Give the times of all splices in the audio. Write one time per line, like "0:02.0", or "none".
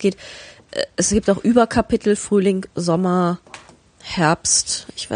none